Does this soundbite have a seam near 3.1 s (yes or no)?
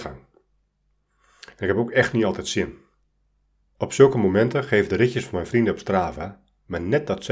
no